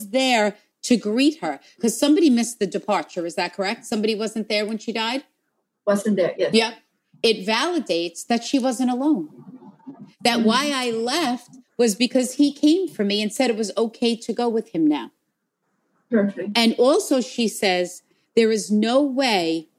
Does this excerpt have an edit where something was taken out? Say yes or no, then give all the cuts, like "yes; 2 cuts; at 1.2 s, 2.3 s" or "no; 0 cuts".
yes; 1 cut; at 6.3 s